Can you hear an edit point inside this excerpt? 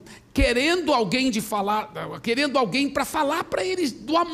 no; 0 cuts

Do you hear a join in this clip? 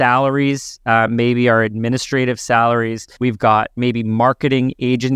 no; 0 cuts

